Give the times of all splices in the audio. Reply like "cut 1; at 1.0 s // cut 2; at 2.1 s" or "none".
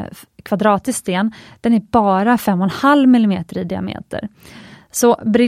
none